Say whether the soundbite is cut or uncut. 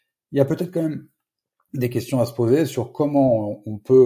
uncut